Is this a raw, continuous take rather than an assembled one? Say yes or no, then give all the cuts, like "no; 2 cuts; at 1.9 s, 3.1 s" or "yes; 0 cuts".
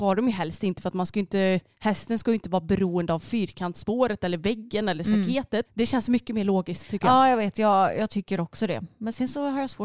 no; 1 cut; at 5.7 s